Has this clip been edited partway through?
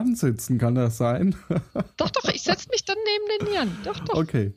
no; 0 cuts

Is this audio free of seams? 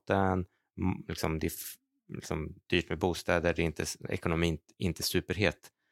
yes; 0 cuts

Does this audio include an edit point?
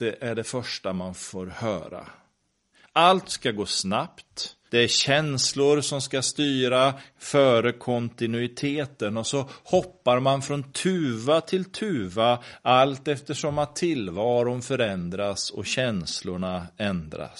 yes; 1 cut; at 4.7 s

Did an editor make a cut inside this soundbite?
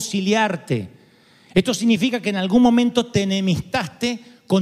no; 0 cuts

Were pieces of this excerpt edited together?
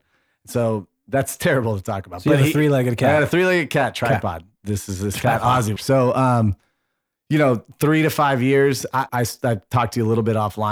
yes; 2 cuts; at 5.8 s, 9.1 s

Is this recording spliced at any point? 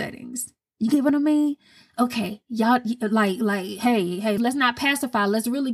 yes; 1 cut; at 4.4 s

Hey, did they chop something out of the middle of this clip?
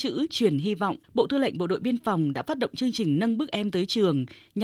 yes; 1 cut; at 1.0 s

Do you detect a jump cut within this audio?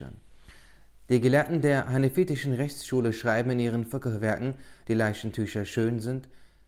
yes; 2 cuts; at 1.1 s, 4.8 s

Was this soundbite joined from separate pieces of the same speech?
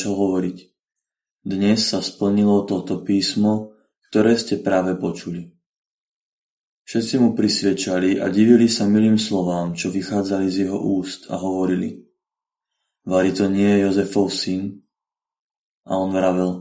no; 0 cuts

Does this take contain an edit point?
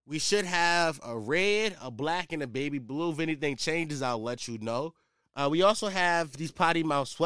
no; 0 cuts

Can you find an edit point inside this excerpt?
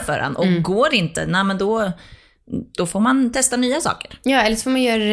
no; 0 cuts

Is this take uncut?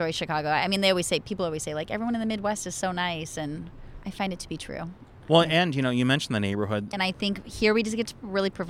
no; 1 cut; at 6.9 s

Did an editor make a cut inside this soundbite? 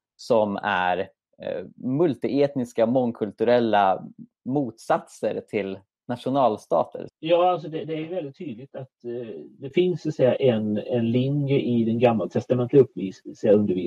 yes; 1 cut; at 7.1 s

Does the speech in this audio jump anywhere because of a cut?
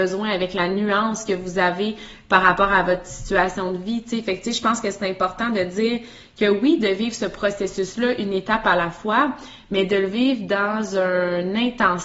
no; 0 cuts

